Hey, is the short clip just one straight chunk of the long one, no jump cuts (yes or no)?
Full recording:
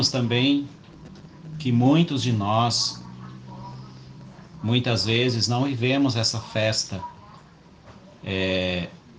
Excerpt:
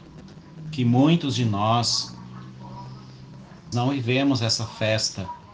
no